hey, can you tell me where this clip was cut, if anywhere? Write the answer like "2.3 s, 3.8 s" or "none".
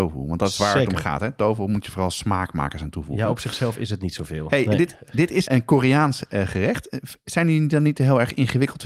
5.5 s